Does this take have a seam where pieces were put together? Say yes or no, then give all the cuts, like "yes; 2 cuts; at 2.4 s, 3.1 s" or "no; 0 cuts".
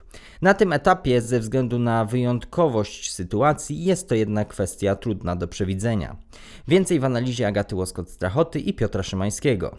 no; 0 cuts